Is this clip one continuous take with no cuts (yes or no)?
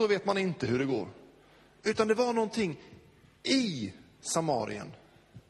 yes